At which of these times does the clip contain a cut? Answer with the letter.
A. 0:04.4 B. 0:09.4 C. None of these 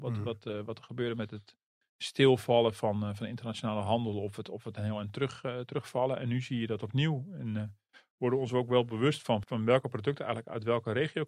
B